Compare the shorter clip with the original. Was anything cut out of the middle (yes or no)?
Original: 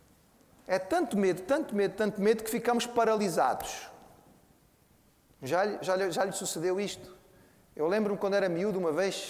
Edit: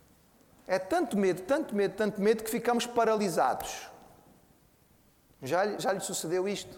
yes